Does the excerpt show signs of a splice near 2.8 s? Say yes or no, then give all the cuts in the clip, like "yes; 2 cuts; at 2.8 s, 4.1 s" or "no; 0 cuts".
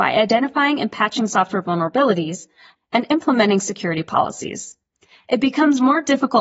yes; 1 cut; at 2.8 s